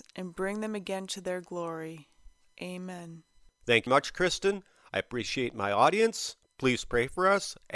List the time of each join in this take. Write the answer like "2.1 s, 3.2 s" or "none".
3.9 s